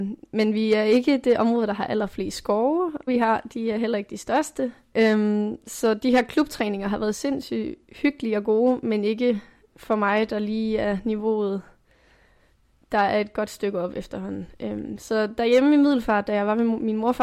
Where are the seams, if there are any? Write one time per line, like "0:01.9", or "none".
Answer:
0:03.1
0:04.9